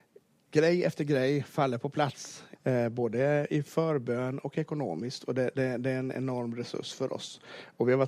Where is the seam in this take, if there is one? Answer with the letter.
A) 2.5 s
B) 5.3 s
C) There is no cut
A